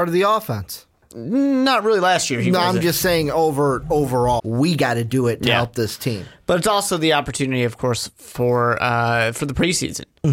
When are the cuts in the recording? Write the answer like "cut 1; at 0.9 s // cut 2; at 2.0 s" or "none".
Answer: cut 1; at 4.4 s